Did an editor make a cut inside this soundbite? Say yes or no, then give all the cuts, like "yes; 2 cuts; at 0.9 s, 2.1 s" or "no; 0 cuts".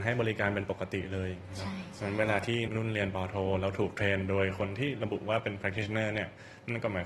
yes; 1 cut; at 2.7 s